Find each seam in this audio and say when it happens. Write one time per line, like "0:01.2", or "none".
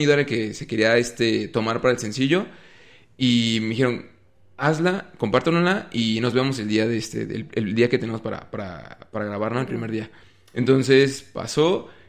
none